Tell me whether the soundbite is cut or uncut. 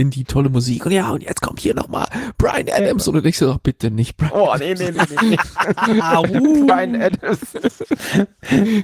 uncut